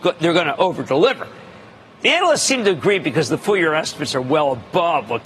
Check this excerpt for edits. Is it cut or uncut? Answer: uncut